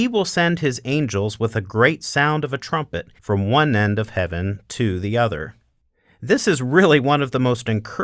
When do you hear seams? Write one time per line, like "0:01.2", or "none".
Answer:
0:03.2

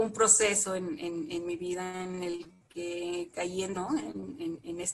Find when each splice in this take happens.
0:03.7

